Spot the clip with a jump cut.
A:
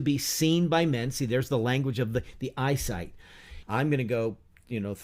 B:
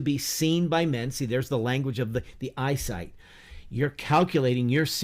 A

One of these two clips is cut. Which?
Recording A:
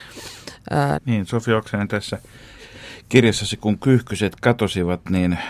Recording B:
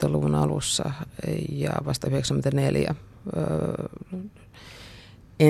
A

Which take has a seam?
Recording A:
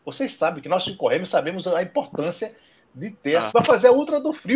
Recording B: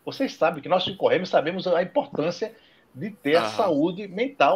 A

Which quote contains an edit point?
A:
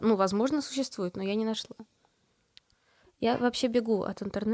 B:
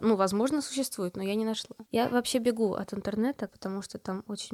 B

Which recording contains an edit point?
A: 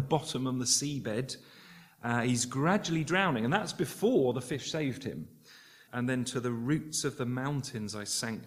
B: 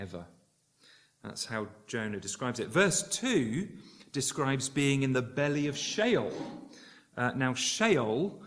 A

